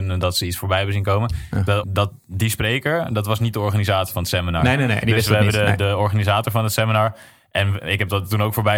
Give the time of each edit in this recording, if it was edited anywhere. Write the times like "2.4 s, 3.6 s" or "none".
1.8 s